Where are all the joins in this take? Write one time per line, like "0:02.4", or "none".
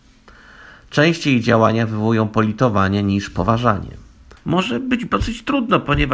0:04.4